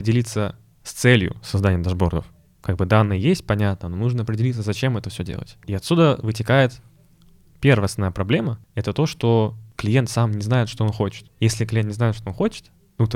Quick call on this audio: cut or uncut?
uncut